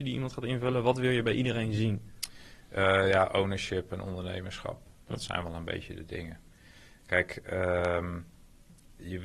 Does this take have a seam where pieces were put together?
no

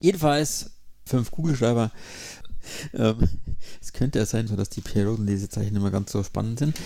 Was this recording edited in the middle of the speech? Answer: yes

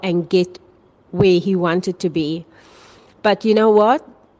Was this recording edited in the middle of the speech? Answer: no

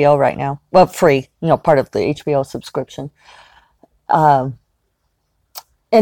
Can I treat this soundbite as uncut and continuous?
yes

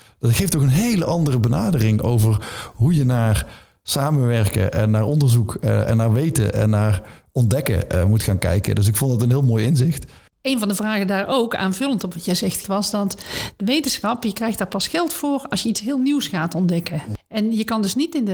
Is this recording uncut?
no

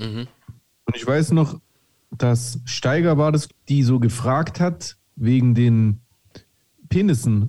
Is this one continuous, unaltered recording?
no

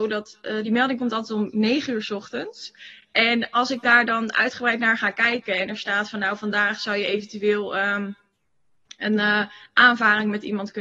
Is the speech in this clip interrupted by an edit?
no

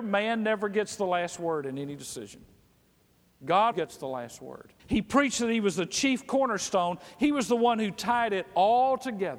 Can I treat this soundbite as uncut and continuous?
no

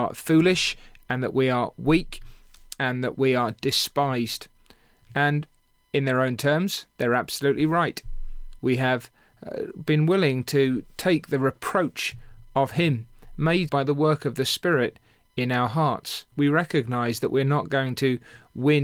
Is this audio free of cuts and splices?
no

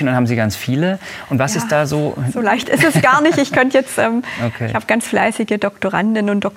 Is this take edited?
no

